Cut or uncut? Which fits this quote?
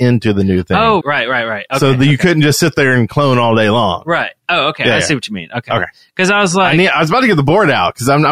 cut